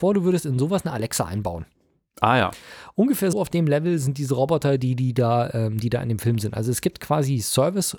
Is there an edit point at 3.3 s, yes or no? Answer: yes